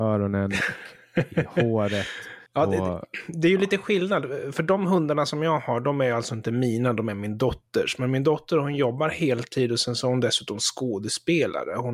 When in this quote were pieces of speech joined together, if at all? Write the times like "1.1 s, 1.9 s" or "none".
2.5 s